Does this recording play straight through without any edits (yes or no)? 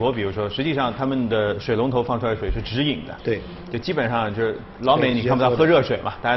yes